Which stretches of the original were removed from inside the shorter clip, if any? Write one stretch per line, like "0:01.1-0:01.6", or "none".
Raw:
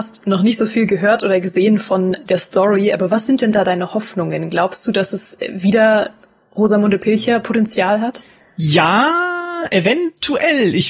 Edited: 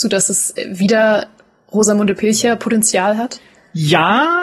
none